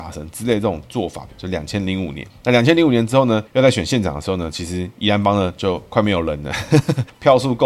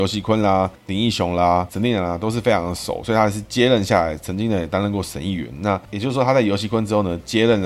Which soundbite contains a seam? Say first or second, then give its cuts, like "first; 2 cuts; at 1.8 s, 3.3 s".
first; 1 cut; at 1.3 s